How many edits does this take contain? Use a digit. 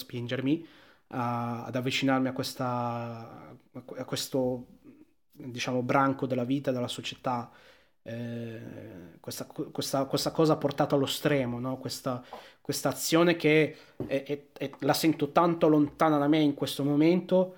0